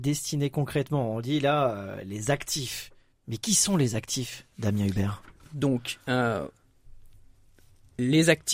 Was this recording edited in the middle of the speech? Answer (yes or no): no